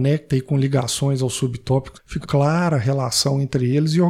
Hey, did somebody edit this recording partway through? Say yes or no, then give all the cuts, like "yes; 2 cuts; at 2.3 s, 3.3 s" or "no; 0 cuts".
yes; 1 cut; at 2.2 s